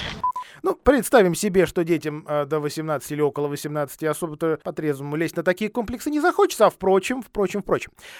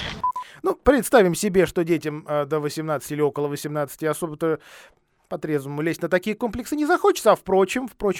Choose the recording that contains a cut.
first; 1 cut; at 4.6 s

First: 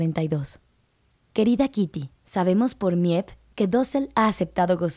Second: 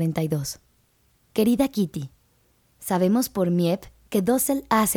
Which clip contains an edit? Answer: first; 1 cut; at 2.2 s

